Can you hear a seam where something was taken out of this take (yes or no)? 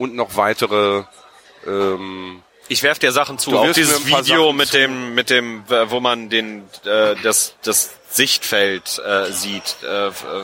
no